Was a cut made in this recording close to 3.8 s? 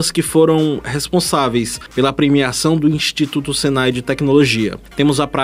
no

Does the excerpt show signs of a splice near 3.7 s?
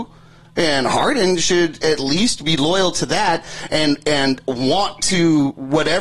no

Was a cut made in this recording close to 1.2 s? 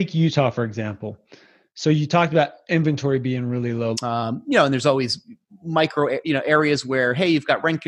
no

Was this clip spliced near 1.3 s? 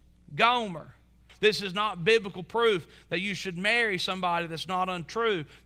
yes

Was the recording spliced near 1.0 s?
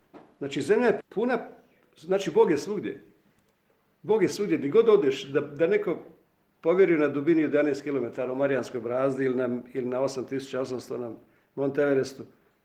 yes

